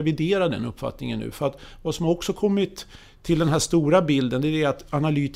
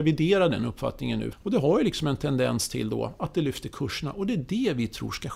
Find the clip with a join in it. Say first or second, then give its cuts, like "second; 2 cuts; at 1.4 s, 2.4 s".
second; 1 cut; at 1.3 s